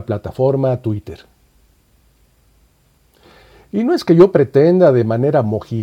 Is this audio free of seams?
yes; 0 cuts

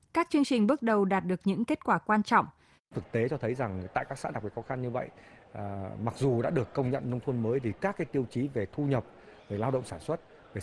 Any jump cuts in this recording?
yes; 2 cuts; at 2.8 s, 9.4 s

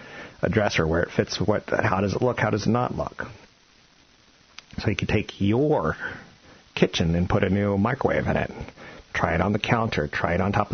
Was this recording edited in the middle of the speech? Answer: no; 0 cuts

